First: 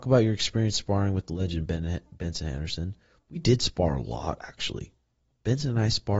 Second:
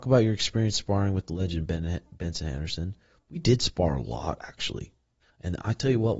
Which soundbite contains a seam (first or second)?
second